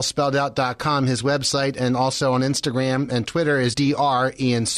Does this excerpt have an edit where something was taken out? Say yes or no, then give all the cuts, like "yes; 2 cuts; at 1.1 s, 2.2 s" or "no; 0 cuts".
yes; 1 cut; at 3.7 s